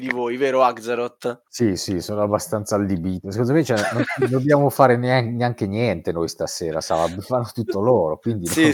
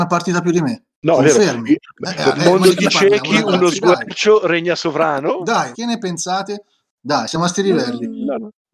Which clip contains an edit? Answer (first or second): second